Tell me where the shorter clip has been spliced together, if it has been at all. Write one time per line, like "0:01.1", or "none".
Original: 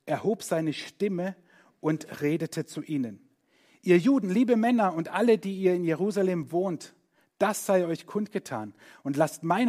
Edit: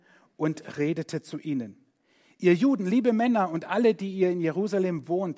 none